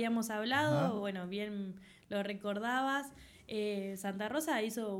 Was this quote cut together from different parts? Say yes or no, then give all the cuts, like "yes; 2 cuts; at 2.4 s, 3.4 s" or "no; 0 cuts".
no; 0 cuts